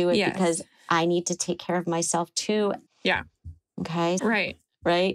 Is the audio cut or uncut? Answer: cut